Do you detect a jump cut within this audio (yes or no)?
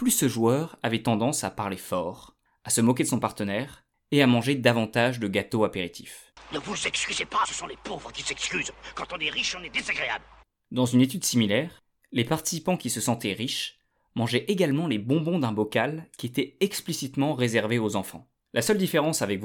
yes